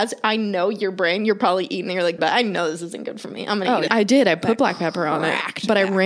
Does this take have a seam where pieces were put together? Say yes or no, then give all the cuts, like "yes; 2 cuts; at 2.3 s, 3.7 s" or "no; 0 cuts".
yes; 2 cuts; at 2.2 s, 3.9 s